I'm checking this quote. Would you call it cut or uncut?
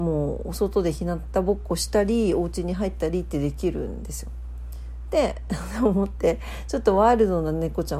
uncut